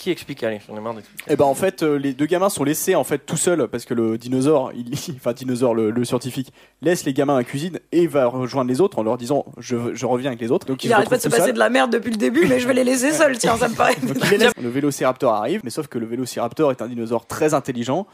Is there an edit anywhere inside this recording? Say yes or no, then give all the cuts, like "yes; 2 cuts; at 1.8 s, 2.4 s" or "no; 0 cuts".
yes; 3 cuts; at 10.7 s, 14.5 s, 15.6 s